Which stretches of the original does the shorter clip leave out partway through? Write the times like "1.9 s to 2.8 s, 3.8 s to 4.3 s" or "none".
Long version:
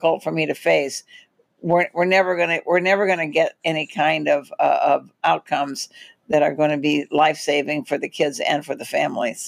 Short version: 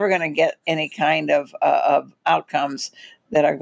none